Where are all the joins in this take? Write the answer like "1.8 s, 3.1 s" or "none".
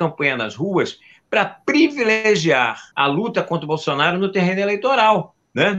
2.9 s